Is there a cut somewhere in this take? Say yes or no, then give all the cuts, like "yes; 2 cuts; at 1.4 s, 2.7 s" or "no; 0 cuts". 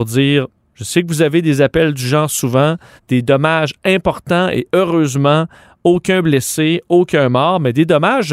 yes; 1 cut; at 3.0 s